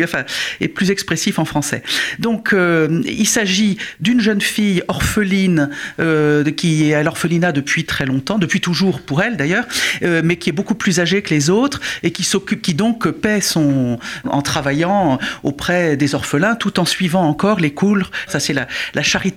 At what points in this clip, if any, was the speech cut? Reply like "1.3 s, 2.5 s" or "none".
14.2 s, 18.3 s